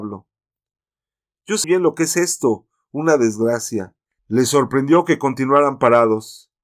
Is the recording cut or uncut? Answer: cut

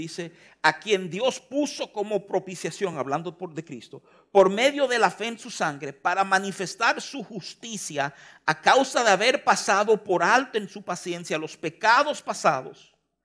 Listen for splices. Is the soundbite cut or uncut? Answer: uncut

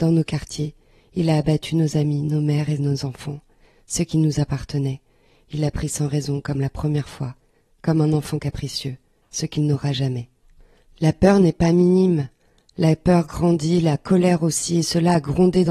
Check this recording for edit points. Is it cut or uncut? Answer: uncut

